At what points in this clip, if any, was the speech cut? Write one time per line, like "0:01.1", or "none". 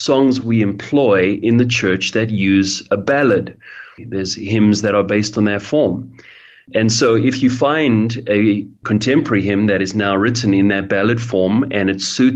0:04.0